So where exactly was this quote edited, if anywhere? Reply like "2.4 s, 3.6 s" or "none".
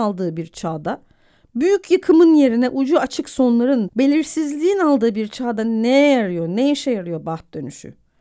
3.9 s